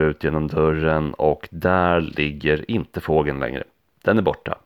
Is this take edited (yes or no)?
no